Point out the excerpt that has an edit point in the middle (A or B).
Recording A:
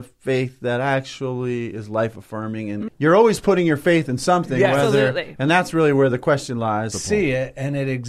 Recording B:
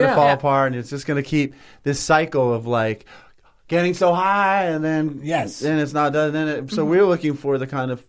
A